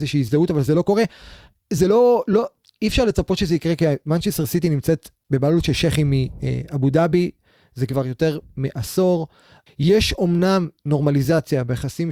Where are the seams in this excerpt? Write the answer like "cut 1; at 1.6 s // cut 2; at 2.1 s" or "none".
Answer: cut 1; at 9.7 s